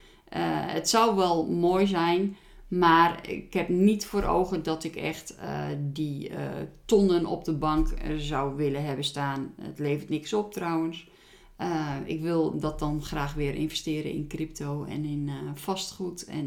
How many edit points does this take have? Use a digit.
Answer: 0